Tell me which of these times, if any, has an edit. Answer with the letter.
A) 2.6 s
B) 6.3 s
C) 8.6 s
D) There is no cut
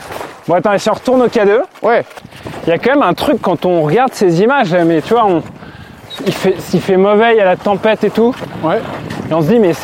D